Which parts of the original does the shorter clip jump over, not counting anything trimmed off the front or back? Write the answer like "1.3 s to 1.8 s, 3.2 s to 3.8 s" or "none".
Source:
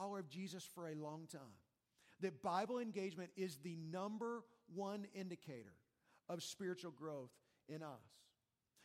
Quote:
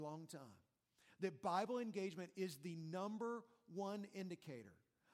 none